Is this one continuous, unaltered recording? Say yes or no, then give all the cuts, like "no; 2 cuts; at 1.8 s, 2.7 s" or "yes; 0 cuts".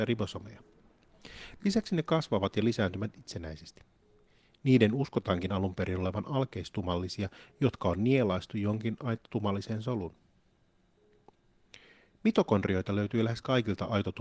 yes; 0 cuts